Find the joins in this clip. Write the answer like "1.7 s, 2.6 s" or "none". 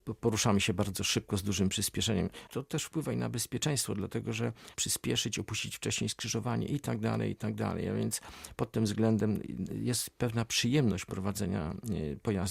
2.5 s, 4.7 s